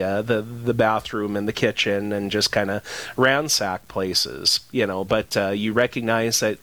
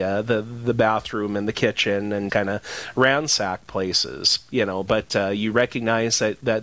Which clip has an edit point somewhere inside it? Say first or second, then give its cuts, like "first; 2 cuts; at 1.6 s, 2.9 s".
second; 1 cut; at 2.3 s